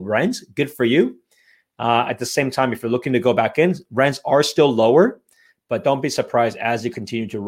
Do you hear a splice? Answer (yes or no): no